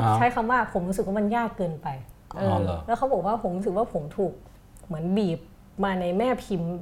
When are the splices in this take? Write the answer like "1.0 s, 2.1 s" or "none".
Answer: 2.3 s